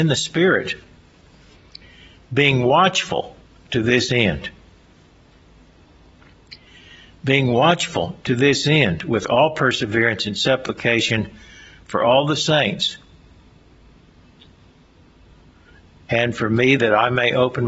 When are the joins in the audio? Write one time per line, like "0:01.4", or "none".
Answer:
0:16.8